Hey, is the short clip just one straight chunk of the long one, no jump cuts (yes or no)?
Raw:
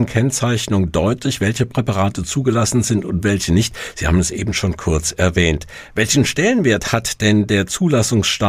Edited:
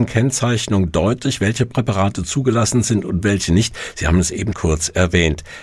no